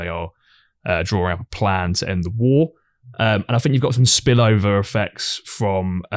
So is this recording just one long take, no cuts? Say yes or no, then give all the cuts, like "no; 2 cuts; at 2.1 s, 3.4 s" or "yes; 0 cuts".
yes; 0 cuts